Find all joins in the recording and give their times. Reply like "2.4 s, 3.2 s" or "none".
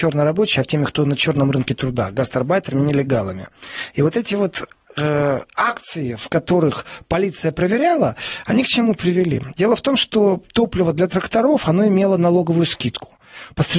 none